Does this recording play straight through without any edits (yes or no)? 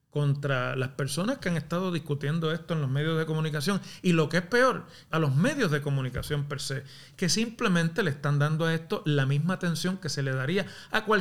no